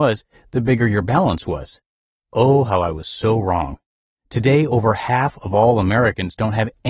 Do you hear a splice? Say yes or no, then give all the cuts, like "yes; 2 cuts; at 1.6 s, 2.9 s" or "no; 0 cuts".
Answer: no; 0 cuts